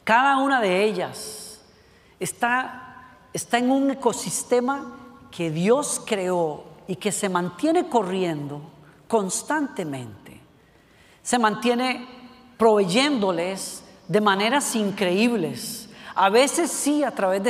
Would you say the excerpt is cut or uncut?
uncut